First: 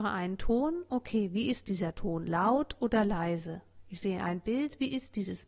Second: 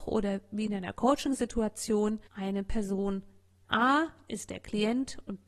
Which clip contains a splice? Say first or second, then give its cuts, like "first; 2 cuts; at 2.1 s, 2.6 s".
second; 2 cuts; at 2.3 s, 3.6 s